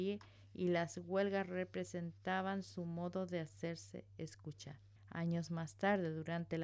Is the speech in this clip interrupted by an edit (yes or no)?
yes